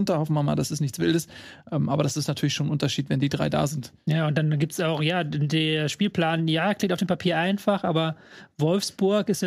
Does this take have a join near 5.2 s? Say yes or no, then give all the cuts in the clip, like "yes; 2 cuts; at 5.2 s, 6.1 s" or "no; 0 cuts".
no; 0 cuts